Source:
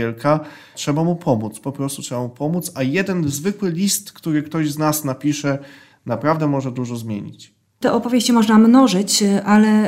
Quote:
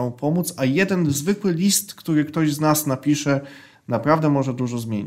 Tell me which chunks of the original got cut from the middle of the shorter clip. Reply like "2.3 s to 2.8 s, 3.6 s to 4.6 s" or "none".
none